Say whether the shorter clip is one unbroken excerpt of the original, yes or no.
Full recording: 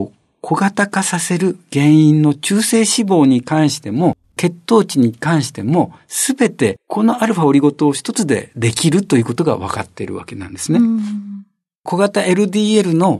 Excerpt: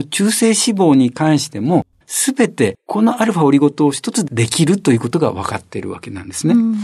no